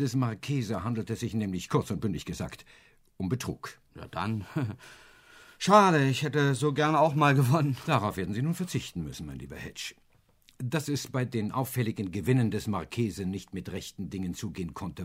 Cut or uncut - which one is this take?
uncut